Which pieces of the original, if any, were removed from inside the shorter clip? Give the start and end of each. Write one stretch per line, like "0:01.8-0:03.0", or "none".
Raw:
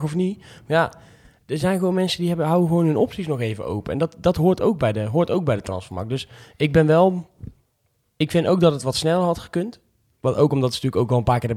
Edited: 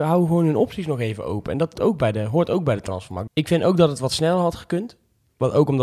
0:04.2-0:04.6
0:06.1-0:08.1

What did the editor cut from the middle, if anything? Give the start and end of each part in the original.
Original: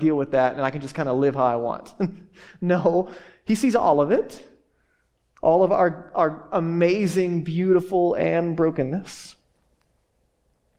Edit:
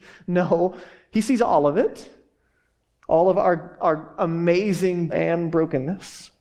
0:07.4-0:08.1

